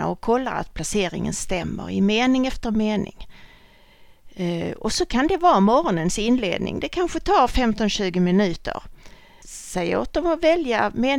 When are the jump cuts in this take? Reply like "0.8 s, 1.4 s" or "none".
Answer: 9.4 s